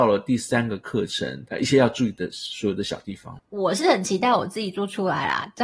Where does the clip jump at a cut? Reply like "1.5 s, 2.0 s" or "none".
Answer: 1.5 s